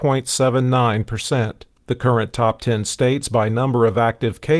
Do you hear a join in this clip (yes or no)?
yes